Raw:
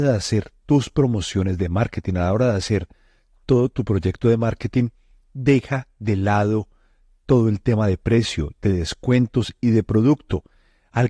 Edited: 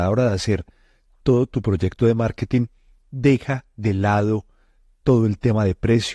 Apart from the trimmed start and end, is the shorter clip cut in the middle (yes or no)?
no